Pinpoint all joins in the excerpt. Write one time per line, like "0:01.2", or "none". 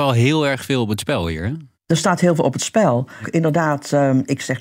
0:01.7
0:03.2